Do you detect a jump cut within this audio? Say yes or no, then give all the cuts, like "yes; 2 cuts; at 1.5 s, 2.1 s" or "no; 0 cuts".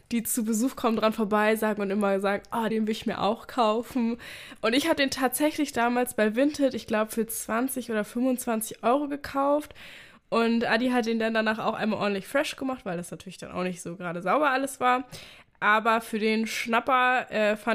yes; 1 cut; at 2.7 s